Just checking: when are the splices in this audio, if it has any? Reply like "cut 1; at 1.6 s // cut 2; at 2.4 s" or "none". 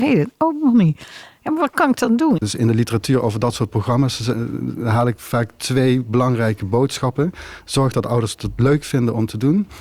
cut 1; at 2.4 s